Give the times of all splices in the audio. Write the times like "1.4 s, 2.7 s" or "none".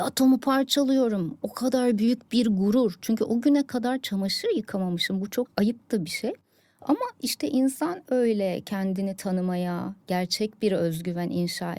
8.1 s